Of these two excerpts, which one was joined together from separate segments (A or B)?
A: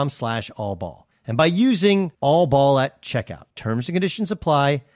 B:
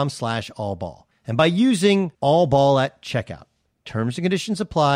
A